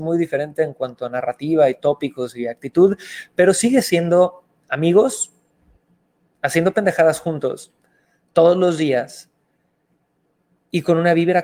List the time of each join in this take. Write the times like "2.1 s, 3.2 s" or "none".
none

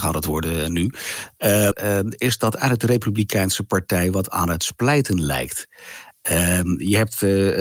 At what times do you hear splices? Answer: 1.7 s

